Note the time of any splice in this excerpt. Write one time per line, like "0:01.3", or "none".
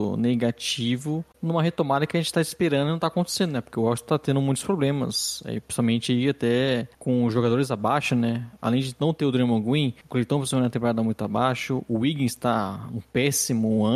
none